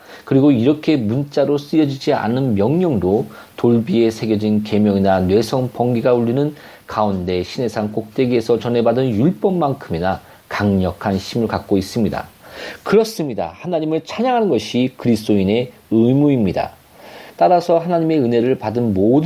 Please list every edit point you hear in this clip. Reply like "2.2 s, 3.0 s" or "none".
17.3 s